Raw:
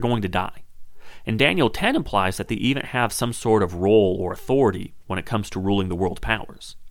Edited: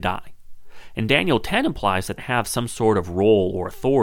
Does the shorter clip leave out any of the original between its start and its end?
yes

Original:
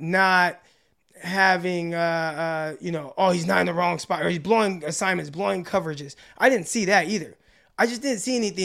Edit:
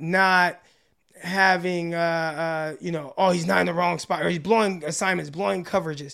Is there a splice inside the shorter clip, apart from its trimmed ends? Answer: no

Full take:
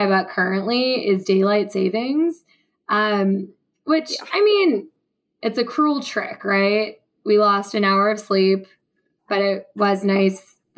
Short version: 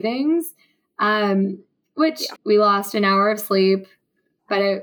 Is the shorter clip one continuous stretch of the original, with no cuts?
no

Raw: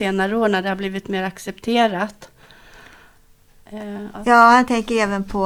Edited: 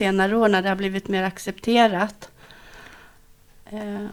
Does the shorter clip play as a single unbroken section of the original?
yes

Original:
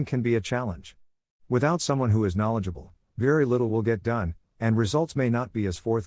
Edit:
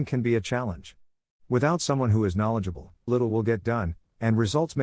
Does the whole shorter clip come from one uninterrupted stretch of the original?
no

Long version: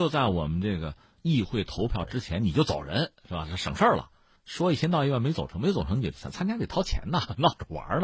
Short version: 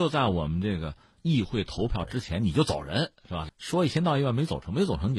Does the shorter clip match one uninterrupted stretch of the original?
no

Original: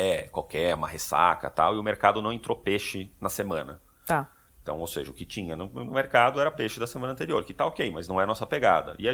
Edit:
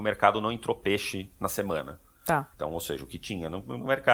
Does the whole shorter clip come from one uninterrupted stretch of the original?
no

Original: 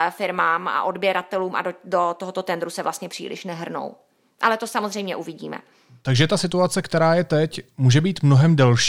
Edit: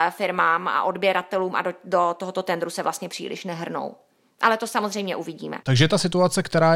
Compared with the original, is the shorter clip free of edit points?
no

